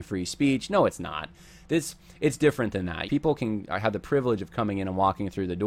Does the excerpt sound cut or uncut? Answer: cut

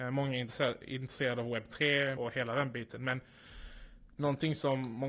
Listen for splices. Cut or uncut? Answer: cut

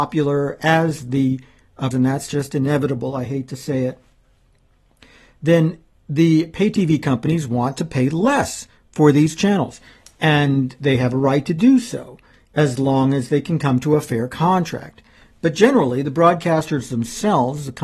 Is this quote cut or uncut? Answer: cut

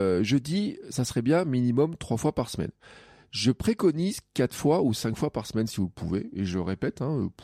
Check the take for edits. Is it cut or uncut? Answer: uncut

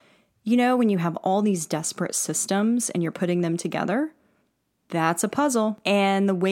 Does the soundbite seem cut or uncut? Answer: uncut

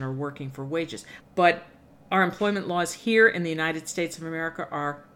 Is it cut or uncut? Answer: cut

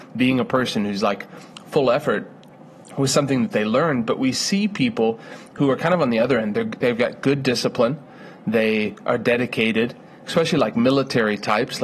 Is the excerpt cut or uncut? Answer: uncut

